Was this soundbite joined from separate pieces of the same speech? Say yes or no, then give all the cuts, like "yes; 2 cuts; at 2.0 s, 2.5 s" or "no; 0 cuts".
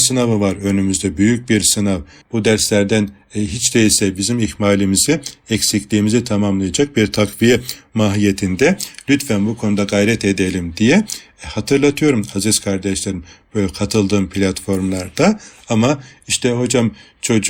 yes; 1 cut; at 2.2 s